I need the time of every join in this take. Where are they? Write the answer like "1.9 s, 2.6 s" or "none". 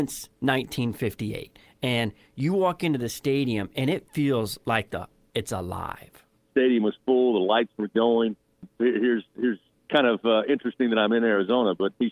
6.4 s, 8.8 s